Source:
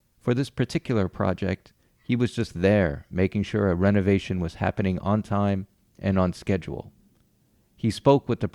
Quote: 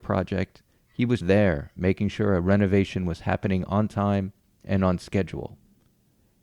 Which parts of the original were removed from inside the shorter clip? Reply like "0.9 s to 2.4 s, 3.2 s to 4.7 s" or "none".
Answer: 2.3 s to 2.5 s